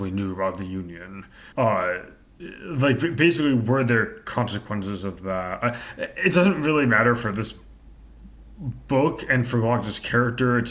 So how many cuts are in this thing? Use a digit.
1